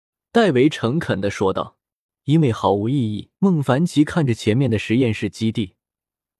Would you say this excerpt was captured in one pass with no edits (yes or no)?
no